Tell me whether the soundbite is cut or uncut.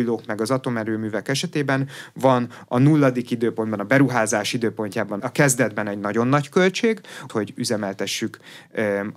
cut